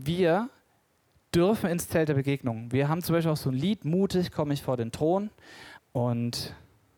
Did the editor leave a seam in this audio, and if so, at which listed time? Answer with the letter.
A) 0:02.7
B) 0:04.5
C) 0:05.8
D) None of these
C